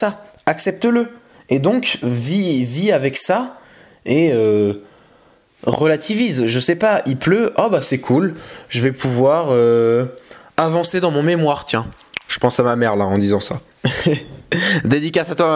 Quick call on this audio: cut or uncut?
uncut